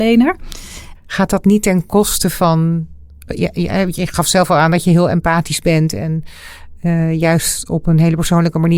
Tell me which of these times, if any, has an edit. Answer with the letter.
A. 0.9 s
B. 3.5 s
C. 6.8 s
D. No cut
A